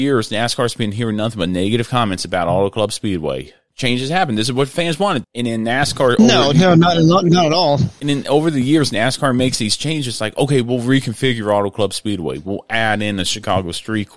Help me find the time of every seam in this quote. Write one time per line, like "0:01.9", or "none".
0:05.2